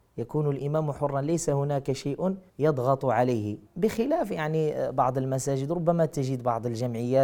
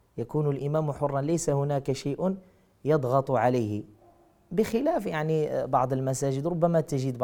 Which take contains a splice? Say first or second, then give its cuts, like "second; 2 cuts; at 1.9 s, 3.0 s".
first; 2 cuts; at 2.5 s, 3.7 s